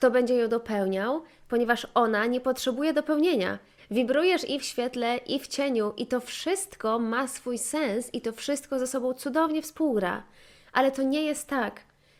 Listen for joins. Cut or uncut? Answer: cut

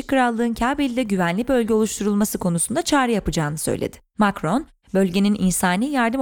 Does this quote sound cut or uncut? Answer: uncut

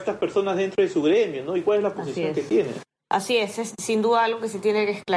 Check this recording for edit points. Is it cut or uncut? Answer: uncut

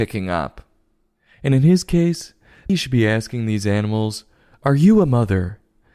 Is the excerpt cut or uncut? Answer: cut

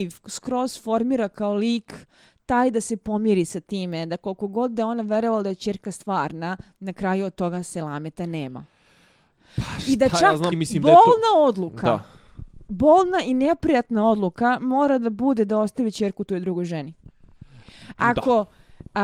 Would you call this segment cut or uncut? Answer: cut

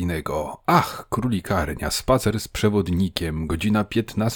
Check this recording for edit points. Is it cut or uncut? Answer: uncut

